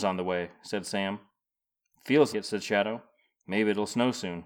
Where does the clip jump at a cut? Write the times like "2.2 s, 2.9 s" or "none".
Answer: 2.3 s